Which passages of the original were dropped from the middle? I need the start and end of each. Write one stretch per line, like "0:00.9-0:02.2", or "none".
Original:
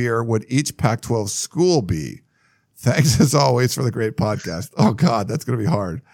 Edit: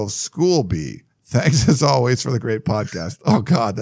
0:02.3-0:02.6